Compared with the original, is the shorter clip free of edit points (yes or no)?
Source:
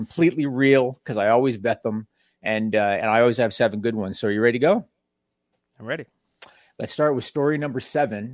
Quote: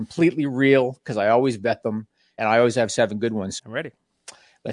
no